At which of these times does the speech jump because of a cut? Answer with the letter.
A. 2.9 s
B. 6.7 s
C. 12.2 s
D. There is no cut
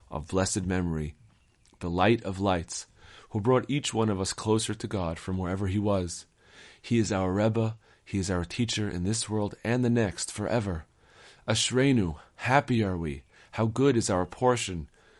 D